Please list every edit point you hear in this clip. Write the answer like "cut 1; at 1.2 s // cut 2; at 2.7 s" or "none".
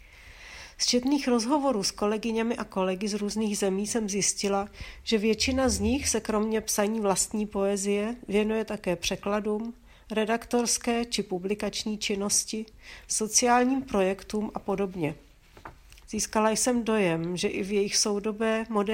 cut 1; at 13.1 s // cut 2; at 16.0 s

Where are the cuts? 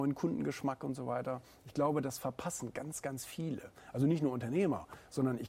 none

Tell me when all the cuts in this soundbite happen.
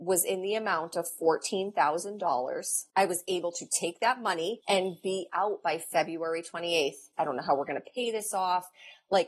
cut 1; at 4.6 s // cut 2; at 7.1 s

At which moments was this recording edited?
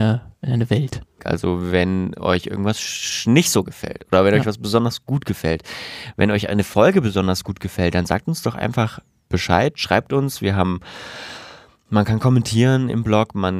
cut 1; at 1.2 s

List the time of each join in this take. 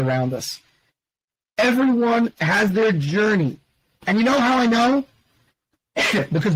none

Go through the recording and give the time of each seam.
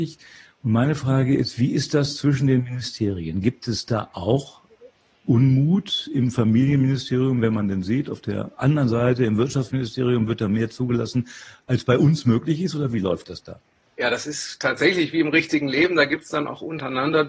none

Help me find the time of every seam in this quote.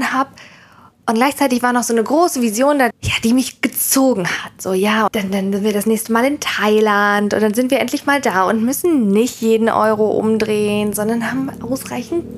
cut 1; at 2.9 s // cut 2; at 5.1 s

